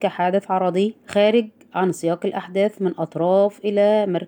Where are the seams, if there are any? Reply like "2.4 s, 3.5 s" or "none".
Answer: 1.0 s